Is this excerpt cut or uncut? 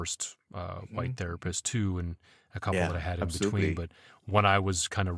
uncut